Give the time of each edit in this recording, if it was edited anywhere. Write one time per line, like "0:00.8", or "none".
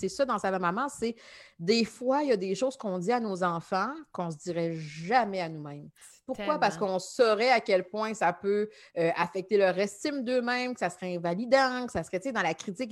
none